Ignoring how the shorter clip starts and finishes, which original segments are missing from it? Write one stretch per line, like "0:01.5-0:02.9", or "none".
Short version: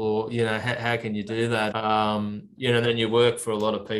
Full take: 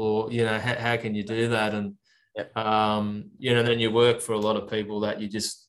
0:01.7-0:02.5